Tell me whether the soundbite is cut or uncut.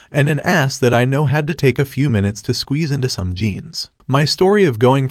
cut